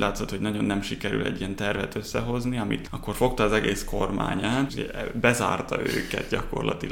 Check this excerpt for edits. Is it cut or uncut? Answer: cut